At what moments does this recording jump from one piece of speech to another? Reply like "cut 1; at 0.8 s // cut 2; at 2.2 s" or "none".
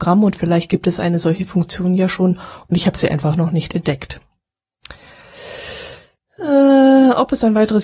none